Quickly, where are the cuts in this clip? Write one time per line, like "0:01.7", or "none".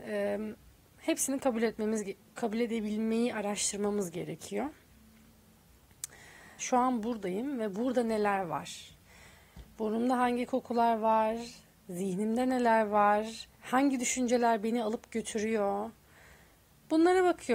0:06.6
0:13.5